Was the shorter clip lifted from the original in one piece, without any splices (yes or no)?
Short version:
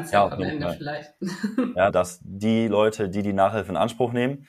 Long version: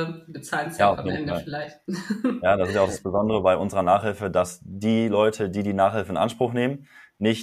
no